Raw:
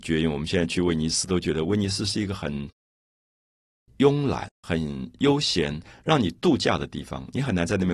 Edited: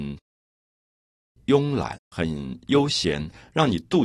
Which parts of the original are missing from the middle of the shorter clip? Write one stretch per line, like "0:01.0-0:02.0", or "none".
none